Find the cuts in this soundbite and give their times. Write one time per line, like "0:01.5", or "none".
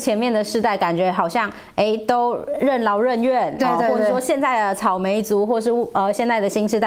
0:03.6

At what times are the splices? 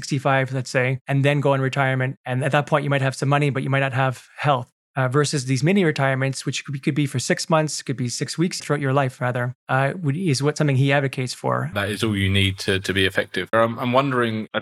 0:08.6
0:11.7
0:13.5

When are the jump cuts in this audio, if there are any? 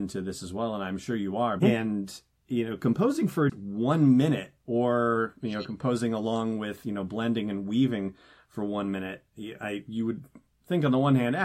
0:01.6
0:03.5

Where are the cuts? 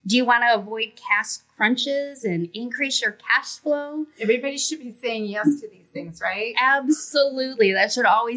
none

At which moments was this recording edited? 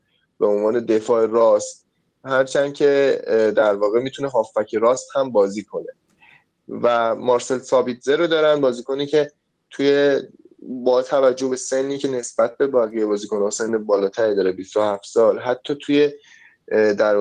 none

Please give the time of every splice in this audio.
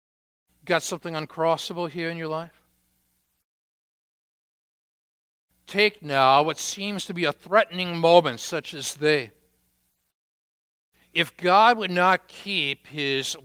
none

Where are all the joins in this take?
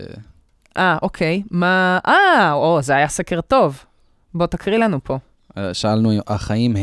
none

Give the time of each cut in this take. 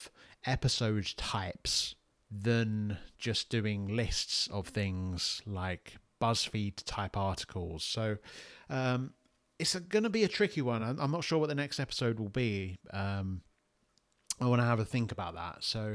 none

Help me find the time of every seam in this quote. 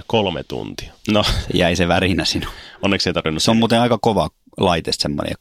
0:01.0

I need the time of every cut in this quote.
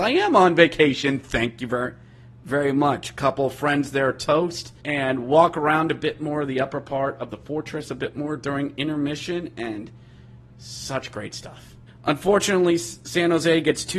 0:04.8
0:11.9

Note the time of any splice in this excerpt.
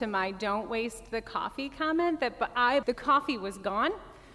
0:02.8

